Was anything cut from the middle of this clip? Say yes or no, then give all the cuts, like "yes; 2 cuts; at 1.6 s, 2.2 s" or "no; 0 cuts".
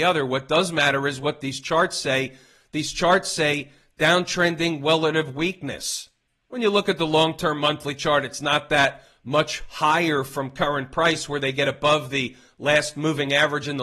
no; 0 cuts